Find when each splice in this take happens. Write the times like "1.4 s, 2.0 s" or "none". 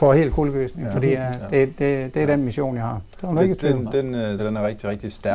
3.1 s, 4.4 s